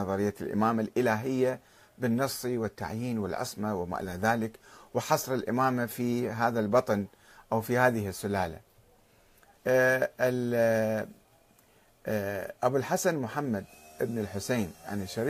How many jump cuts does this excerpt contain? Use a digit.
2